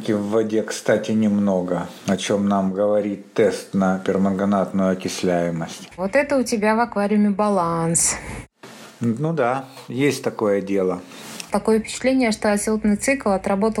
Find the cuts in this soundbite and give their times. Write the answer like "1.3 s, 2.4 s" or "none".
6.0 s, 11.5 s